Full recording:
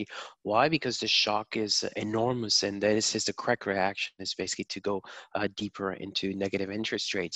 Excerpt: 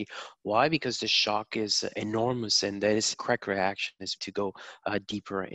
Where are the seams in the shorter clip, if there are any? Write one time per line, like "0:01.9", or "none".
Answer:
0:03.1
0:04.2